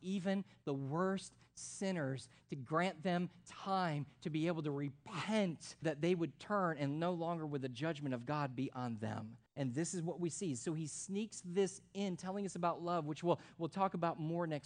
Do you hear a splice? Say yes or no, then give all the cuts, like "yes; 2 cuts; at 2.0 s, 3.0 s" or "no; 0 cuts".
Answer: yes; 2 cuts; at 5.8 s, 9.5 s